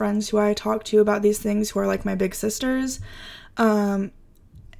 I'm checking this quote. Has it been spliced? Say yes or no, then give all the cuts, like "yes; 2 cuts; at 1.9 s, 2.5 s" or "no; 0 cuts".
no; 0 cuts